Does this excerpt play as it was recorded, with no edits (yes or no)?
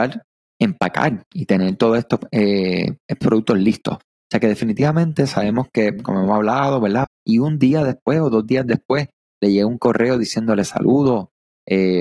no